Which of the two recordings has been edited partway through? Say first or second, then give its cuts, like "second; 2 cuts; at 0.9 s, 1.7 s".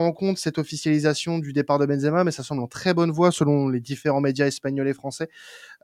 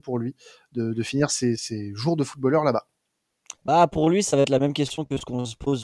second; 1 cut; at 1.6 s